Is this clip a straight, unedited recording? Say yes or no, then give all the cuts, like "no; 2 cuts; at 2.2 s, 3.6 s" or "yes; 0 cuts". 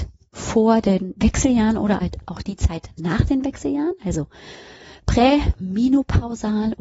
yes; 0 cuts